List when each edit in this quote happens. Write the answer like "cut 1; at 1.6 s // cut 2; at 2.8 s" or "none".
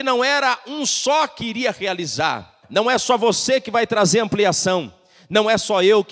cut 1; at 2.6 s

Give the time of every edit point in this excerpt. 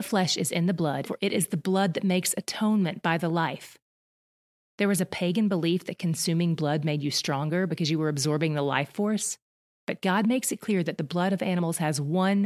cut 1; at 1.0 s

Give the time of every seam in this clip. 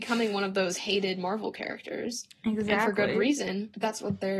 none

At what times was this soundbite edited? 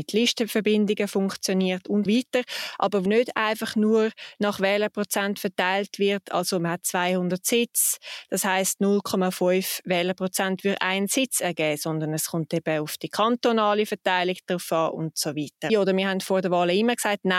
cut 1; at 2.1 s // cut 2; at 3.1 s // cut 3; at 15.7 s

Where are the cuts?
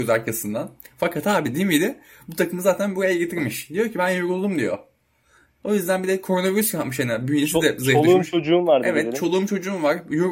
none

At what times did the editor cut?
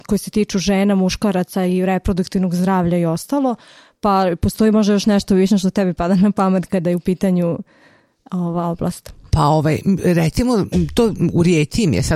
none

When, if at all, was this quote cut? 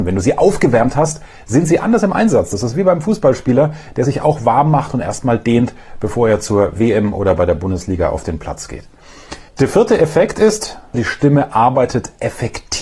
cut 1; at 9.5 s // cut 2; at 10.9 s

